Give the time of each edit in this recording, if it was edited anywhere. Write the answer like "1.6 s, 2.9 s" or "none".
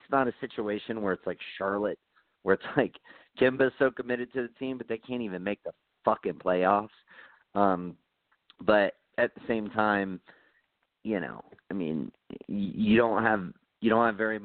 7.3 s